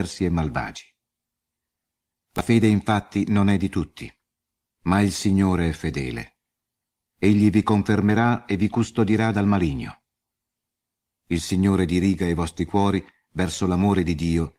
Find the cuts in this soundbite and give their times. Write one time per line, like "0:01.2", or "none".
0:11.1